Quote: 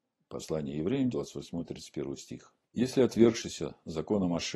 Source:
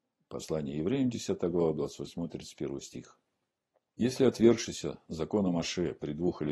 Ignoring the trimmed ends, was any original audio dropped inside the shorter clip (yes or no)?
yes